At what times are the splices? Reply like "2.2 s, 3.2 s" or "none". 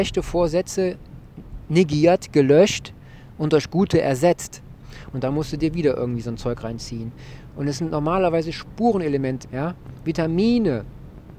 5.1 s, 7.5 s, 9.4 s